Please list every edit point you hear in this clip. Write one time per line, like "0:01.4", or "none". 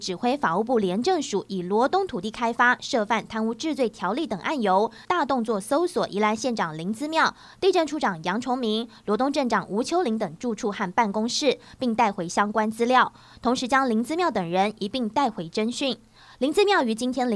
0:05.0